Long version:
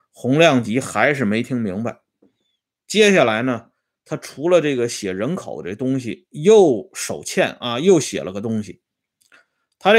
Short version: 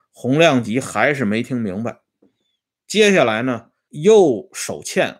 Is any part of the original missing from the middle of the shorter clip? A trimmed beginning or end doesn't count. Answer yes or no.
yes